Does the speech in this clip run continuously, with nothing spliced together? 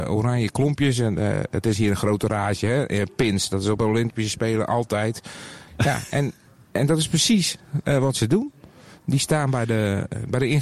no; 1 cut; at 5.7 s

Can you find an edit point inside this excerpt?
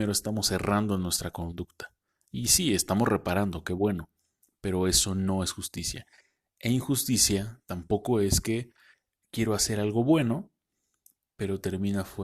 no; 0 cuts

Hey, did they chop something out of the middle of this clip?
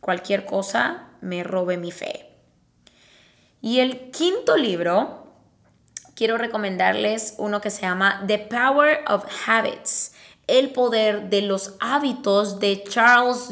no; 0 cuts

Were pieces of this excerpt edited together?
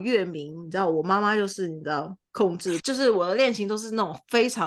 yes; 1 cut; at 2.8 s

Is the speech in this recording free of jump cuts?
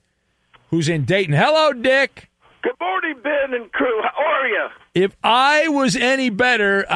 yes; 0 cuts

